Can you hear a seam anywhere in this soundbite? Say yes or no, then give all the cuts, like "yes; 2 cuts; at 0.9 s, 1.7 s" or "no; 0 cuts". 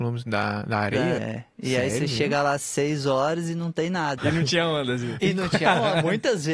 yes; 2 cuts; at 1.2 s, 4.2 s